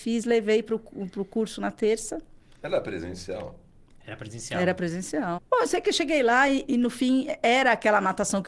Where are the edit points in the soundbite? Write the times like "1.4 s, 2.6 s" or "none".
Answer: 5.4 s